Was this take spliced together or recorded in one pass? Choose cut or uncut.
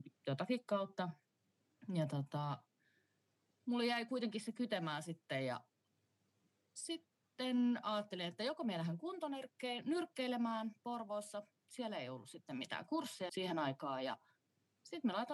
cut